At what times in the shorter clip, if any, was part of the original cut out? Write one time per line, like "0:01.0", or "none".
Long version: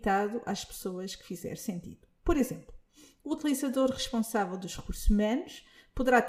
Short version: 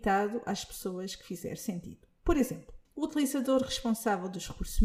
0:02.8